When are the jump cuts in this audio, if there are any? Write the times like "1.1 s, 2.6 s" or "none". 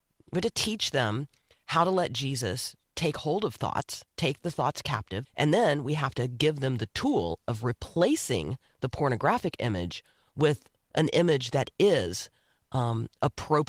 5.2 s